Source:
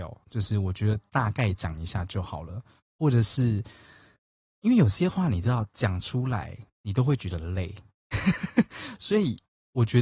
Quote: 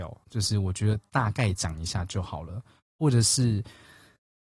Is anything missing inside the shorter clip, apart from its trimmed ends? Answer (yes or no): no